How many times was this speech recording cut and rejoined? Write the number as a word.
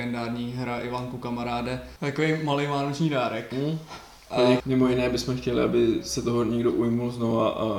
two